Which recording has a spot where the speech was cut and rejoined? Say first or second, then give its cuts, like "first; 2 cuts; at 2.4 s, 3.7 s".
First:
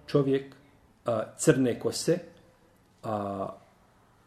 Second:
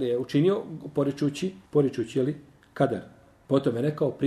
second; 1 cut; at 1.7 s